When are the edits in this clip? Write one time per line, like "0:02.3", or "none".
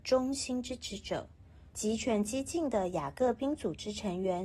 0:01.7